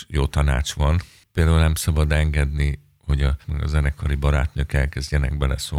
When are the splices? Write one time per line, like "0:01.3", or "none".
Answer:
0:03.4